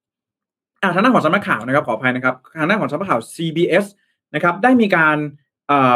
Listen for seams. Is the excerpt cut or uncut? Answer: uncut